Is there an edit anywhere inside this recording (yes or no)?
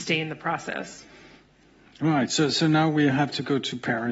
no